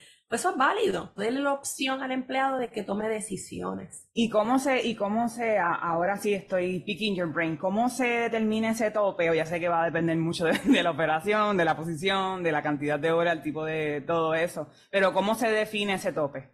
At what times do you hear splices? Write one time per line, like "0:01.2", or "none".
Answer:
0:01.2